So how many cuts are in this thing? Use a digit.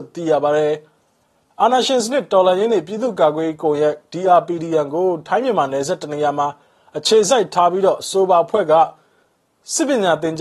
0